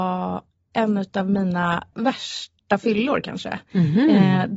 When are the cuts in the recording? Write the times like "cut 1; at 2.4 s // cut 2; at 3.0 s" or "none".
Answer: cut 1; at 1.9 s